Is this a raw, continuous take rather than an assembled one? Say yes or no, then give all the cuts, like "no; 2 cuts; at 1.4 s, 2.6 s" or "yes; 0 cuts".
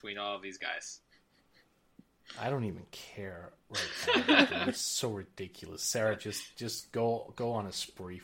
yes; 0 cuts